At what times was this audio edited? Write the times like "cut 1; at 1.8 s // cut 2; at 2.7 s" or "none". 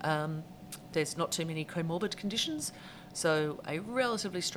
cut 1; at 0.9 s // cut 2; at 3.6 s